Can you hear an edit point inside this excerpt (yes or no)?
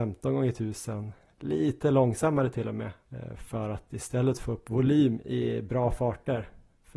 no